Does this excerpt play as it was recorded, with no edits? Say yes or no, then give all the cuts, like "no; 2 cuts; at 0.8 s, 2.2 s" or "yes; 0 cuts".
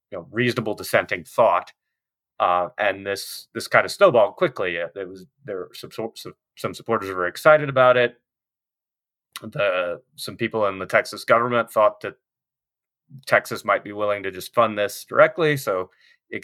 yes; 0 cuts